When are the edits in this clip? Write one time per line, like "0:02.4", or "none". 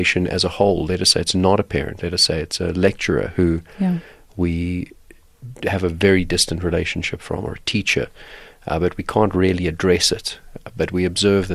none